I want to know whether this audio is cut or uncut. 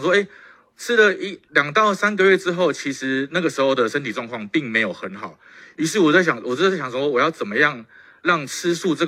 uncut